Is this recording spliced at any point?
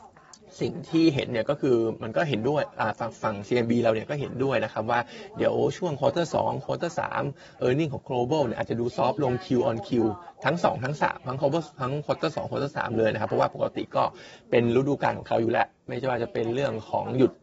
yes; 1 cut; at 7.6 s

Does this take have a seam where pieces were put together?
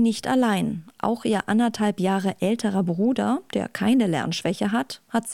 no; 0 cuts

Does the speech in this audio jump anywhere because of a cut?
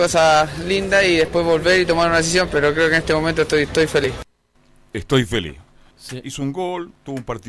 yes; 1 cut; at 5.9 s

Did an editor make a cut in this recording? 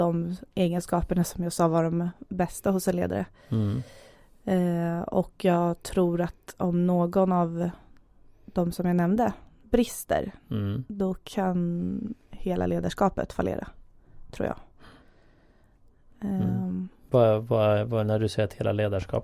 no; 0 cuts

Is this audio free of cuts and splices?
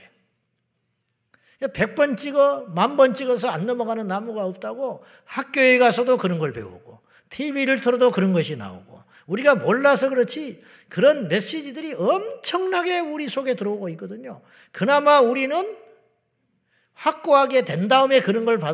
yes; 0 cuts

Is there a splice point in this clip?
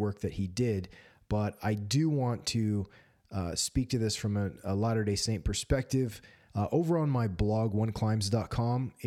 yes; 1 cut; at 6.5 s

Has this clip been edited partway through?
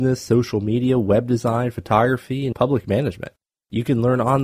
yes; 1 cut; at 2.5 s

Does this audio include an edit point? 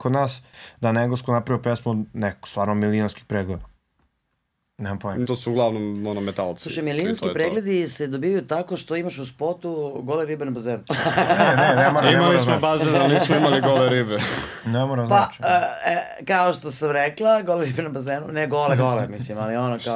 yes; 1 cut; at 5.2 s

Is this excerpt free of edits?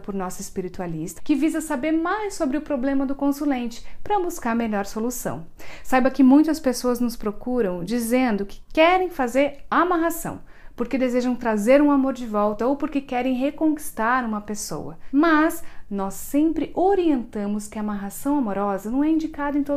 no; 1 cut; at 1.2 s

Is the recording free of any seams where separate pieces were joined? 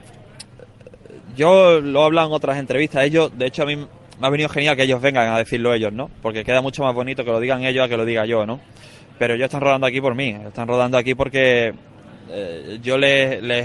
yes; 0 cuts

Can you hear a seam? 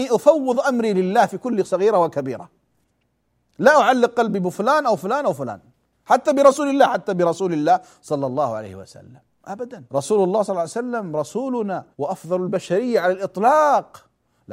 yes; 2 cuts; at 9.9 s, 11.9 s

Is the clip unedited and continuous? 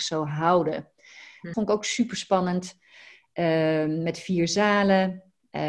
no; 1 cut; at 1.5 s

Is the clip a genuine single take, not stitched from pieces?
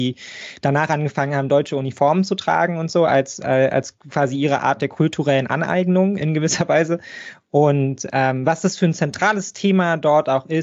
yes; 0 cuts

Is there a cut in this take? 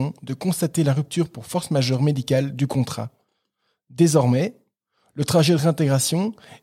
no; 0 cuts

